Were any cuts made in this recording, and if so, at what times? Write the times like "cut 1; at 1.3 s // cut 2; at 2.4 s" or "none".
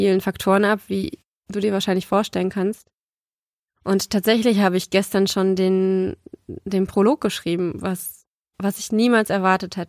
cut 1; at 3.7 s

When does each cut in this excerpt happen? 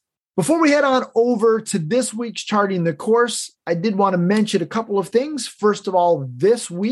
none

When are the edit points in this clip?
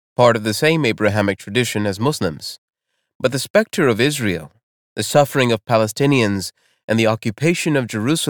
none

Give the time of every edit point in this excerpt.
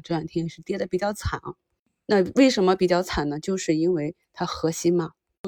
none

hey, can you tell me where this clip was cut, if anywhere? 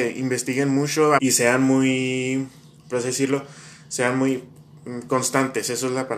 cut 1; at 1.2 s

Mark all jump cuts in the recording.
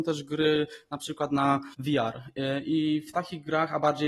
cut 1; at 1.7 s

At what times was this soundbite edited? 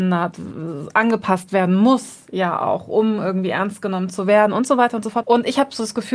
cut 1; at 5.2 s

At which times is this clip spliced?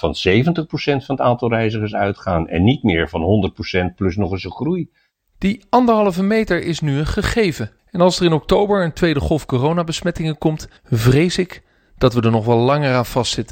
cut 1; at 7.8 s // cut 2; at 10.8 s

